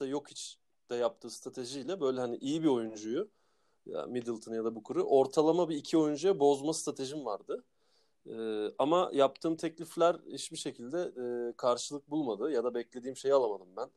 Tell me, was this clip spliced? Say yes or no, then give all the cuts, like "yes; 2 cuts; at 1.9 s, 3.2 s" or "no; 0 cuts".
no; 0 cuts